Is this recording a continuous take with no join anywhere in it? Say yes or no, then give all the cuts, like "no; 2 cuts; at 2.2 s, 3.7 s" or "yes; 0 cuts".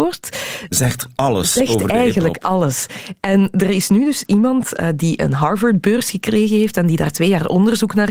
yes; 0 cuts